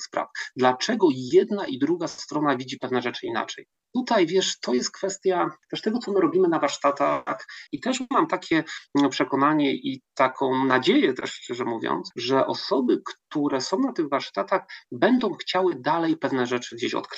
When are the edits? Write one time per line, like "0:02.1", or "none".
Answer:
0:07.7

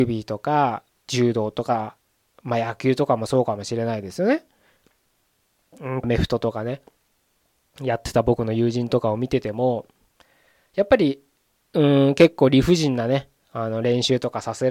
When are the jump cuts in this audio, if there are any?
0:06.0

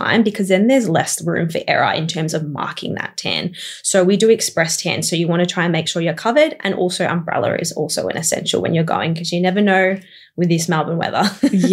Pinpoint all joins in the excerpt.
none

